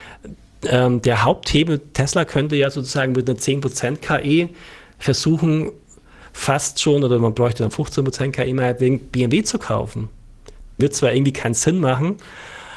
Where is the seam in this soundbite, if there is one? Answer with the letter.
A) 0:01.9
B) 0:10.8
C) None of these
B